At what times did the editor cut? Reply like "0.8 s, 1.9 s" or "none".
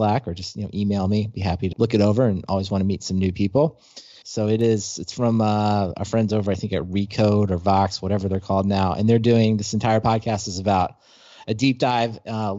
1.7 s, 4.2 s